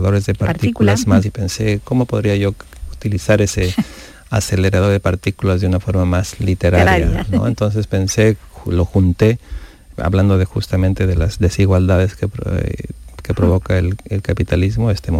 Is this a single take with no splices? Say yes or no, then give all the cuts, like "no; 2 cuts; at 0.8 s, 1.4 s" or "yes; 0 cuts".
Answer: no; 2 cuts; at 1.2 s, 9.9 s